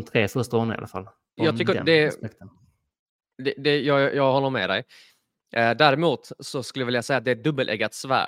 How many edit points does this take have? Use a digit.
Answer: 1